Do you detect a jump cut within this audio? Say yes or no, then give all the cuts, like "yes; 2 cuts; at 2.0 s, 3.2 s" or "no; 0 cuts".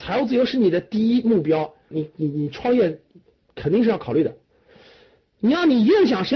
yes; 1 cut; at 1.9 s